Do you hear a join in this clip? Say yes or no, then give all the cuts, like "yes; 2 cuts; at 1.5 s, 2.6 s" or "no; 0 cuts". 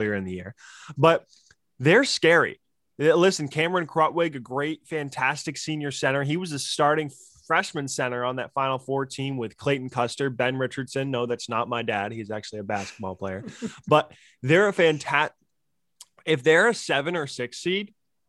no; 0 cuts